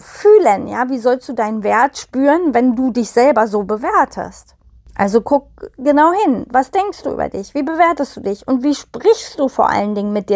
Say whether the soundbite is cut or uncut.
uncut